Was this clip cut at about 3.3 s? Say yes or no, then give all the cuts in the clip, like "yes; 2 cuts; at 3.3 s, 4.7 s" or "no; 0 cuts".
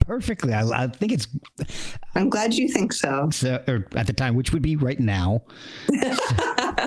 yes; 1 cut; at 3.3 s